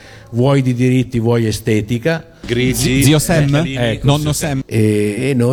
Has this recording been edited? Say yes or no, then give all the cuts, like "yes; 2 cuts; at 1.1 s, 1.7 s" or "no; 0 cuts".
yes; 2 cuts; at 2.4 s, 4.6 s